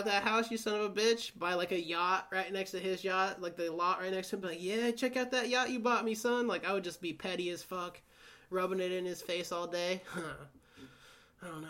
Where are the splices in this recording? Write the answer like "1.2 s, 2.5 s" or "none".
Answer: none